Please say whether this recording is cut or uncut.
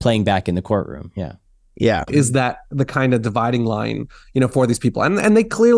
cut